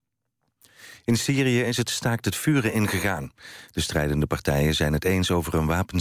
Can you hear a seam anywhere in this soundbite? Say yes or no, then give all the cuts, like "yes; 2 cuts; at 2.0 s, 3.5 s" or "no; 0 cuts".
no; 0 cuts